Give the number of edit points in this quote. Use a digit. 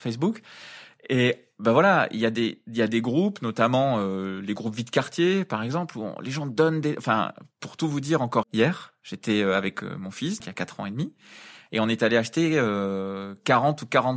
2